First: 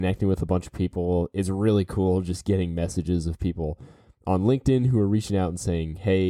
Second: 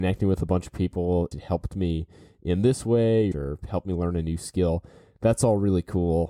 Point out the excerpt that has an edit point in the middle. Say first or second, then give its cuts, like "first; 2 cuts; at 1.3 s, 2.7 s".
second; 2 cuts; at 1.3 s, 3.3 s